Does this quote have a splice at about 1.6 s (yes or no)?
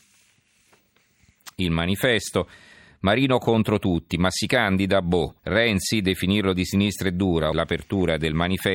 no